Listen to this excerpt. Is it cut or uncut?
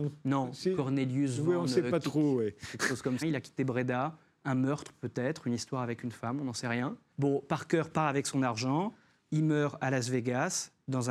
cut